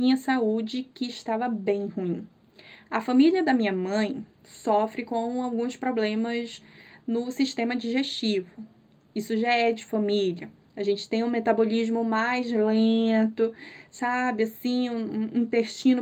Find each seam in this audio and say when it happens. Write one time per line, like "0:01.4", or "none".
none